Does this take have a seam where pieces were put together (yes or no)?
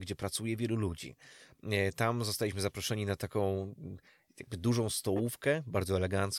no